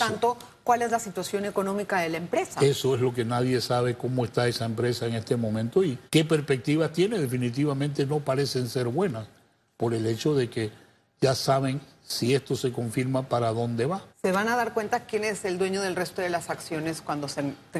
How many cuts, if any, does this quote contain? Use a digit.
2